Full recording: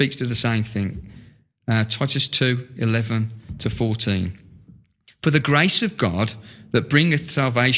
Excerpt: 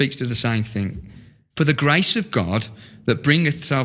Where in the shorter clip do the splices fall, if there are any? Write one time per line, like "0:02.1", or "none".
0:01.5